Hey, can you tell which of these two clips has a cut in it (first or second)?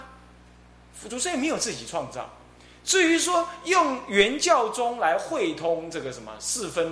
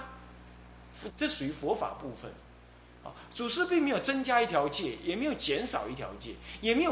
second